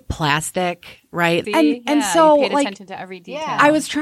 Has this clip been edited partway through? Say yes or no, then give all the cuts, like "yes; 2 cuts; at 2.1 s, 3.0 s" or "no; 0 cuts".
yes; 1 cut; at 1.4 s